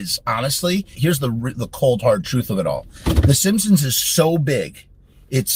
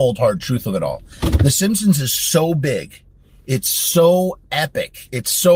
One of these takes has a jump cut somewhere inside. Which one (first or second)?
first